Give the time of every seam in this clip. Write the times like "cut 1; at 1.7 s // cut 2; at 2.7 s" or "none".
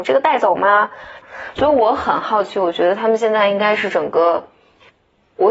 cut 1; at 1.2 s